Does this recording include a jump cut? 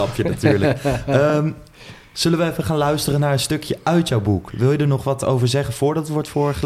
no; 0 cuts

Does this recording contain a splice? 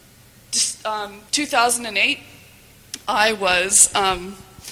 yes; 1 cut; at 1.3 s

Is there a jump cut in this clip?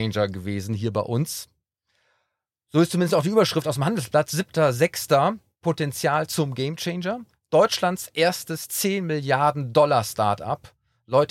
no; 0 cuts

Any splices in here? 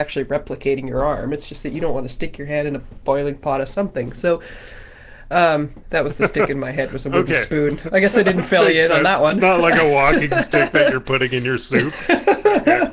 yes; 1 cut; at 5.8 s

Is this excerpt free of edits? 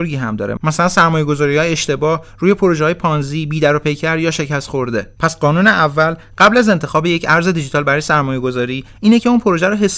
no; 1 cut; at 5.1 s

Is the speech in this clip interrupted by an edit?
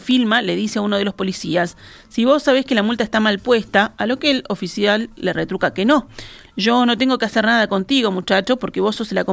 yes; 1 cut; at 6.5 s

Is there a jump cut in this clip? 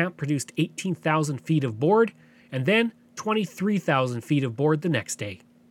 no; 0 cuts

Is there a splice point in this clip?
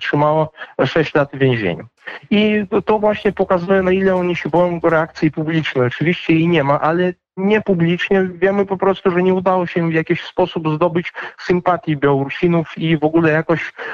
no; 0 cuts

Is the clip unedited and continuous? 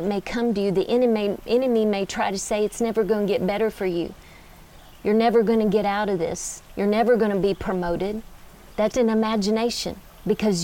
no; 2 cuts; at 6.7 s, 8.9 s

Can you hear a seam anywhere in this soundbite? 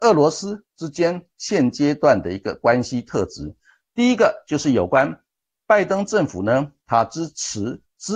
no; 0 cuts

